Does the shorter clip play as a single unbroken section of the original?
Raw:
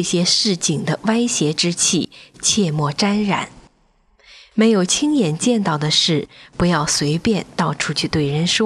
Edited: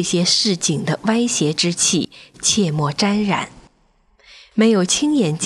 yes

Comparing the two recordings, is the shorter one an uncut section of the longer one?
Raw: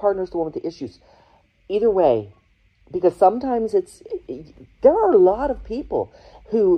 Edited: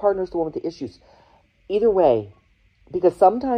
yes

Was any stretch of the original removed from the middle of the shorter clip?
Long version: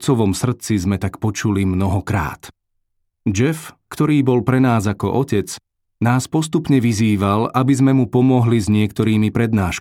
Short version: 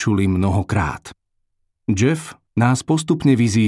yes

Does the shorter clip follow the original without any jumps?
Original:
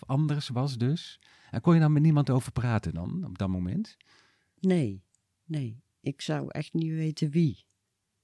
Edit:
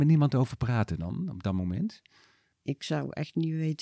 no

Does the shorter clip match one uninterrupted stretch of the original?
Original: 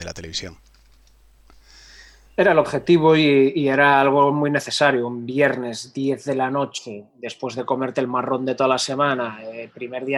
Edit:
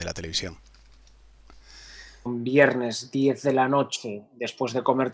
no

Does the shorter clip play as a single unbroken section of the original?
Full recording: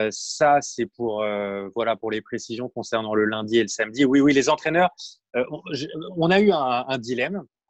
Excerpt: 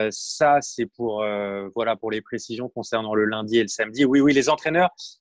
yes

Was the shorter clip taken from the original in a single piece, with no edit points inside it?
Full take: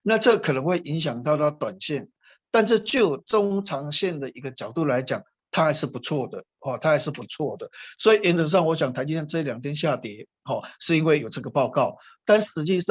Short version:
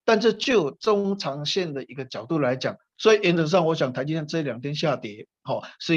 no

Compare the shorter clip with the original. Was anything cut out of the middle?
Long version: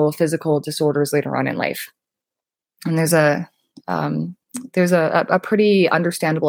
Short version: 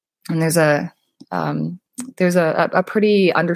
no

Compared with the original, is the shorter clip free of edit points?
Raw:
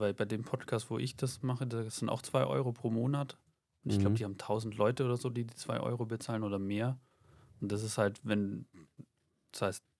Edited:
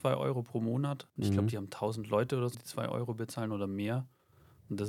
no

